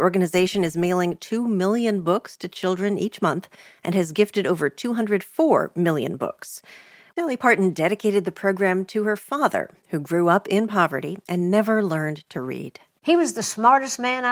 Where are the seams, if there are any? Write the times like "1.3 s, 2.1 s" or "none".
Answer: 7.1 s